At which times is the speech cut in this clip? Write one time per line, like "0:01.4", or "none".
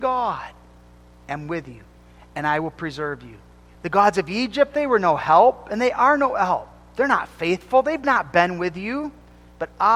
0:02.2
0:03.7